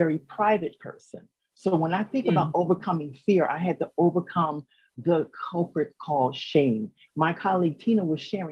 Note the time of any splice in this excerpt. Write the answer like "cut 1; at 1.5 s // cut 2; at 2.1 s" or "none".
cut 1; at 1.4 s // cut 2; at 7.1 s